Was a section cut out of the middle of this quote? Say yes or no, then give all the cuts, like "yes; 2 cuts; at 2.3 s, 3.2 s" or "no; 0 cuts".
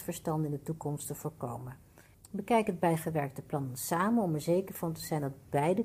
yes; 1 cut; at 2.1 s